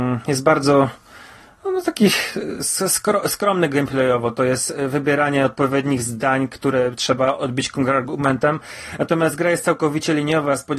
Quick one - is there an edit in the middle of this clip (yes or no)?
no